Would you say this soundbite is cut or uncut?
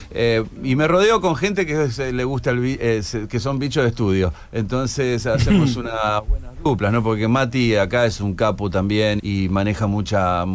cut